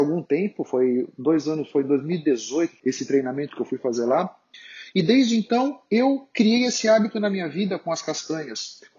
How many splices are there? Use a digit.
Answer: 1